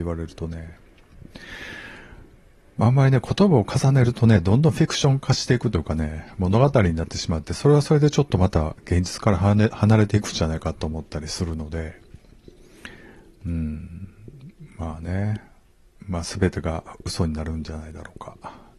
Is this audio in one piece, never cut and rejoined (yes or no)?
yes